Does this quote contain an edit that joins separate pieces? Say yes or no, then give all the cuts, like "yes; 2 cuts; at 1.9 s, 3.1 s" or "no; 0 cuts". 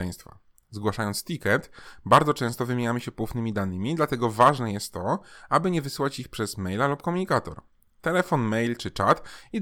no; 0 cuts